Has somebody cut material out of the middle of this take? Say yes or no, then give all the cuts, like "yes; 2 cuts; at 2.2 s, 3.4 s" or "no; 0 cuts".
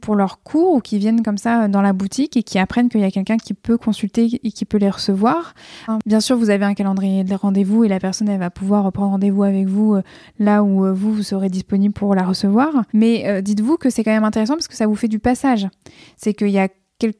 yes; 2 cuts; at 5.9 s, 12.9 s